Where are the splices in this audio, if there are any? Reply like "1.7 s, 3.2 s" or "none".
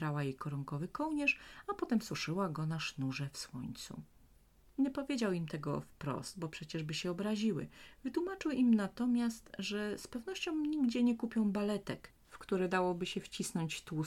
4.6 s